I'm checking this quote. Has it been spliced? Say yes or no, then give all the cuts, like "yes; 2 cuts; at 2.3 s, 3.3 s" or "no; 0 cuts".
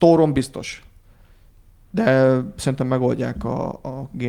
no; 0 cuts